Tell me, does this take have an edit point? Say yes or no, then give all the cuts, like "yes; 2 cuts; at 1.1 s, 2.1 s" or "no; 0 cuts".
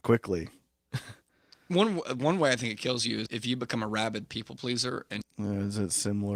yes; 2 cuts; at 3.3 s, 5.2 s